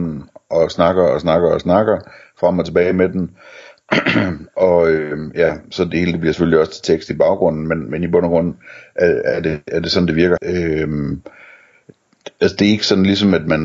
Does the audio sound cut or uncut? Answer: cut